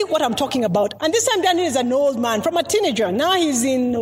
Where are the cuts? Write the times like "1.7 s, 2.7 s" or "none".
1.0 s